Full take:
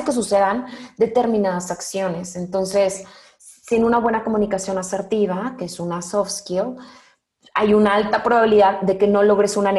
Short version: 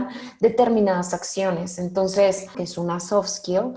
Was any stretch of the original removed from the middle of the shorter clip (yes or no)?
yes